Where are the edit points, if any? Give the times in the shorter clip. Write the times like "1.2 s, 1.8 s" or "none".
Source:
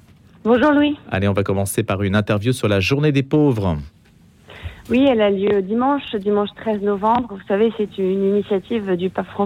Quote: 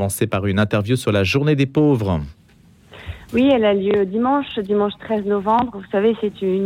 none